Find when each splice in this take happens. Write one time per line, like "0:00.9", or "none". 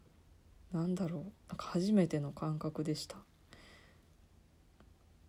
0:01.4